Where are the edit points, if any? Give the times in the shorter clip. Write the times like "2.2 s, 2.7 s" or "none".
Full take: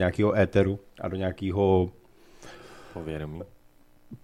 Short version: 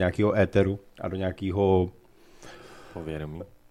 none